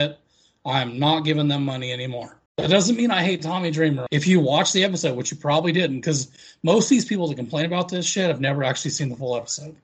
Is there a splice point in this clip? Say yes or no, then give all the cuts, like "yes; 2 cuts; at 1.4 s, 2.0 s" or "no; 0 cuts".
yes; 2 cuts; at 2.5 s, 4.1 s